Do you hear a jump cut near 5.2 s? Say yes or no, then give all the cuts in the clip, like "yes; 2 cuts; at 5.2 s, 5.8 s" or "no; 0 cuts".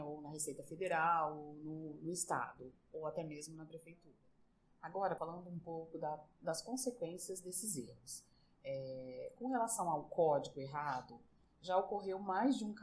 yes; 1 cut; at 5.2 s